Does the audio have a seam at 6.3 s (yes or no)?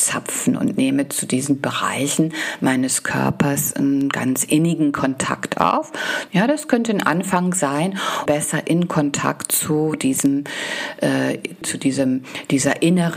yes